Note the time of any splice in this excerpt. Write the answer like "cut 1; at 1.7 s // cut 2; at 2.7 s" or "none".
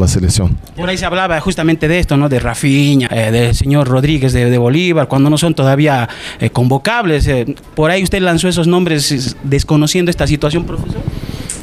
cut 1; at 3.1 s